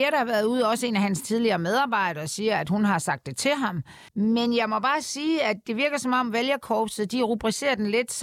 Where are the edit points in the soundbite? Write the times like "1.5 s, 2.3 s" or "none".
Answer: 4.1 s